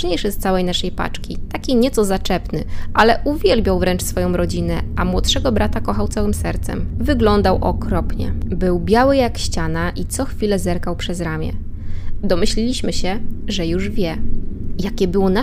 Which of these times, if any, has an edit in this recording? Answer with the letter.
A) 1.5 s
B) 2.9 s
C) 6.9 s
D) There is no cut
C